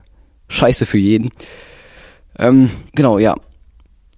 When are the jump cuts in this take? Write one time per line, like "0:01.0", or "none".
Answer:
0:02.9